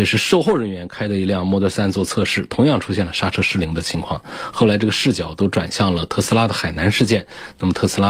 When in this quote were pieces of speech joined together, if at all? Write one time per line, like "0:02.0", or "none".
none